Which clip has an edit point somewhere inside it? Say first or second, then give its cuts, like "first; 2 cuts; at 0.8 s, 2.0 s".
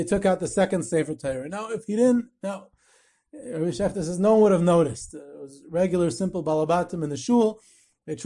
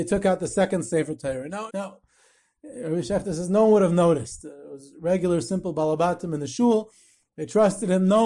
second; 1 cut; at 1.7 s